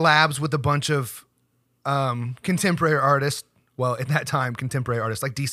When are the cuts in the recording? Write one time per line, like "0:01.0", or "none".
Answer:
none

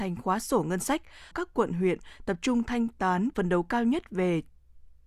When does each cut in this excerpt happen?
0:01.3
0:03.3

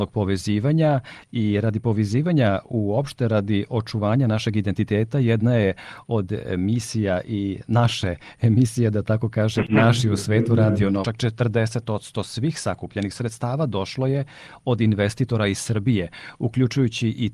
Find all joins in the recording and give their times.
0:11.0

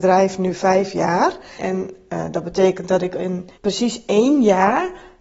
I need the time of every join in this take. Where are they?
0:01.6
0:03.5

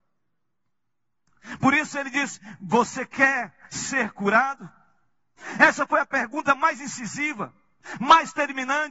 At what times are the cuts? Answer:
none

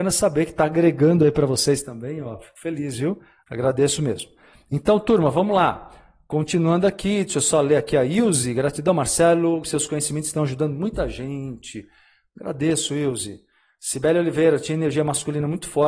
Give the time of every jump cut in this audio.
0:03.4
0:09.6

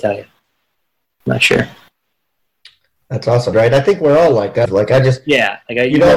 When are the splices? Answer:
0:03.5
0:04.6

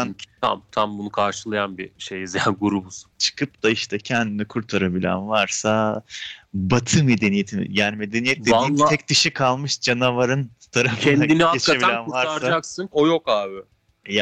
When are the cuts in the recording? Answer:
0:03.1
0:12.9

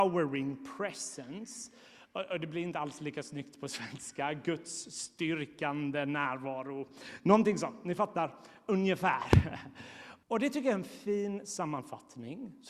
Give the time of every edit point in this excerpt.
0:10.2

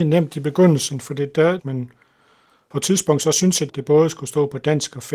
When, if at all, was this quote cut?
0:01.6
0:03.7

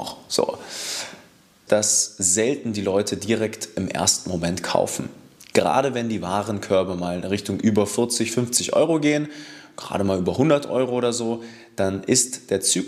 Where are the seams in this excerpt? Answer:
0:01.7

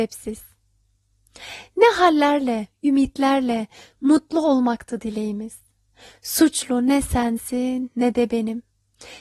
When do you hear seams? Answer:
none

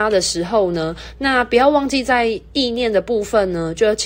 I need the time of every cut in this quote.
none

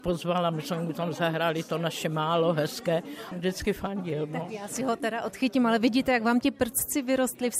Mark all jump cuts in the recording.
none

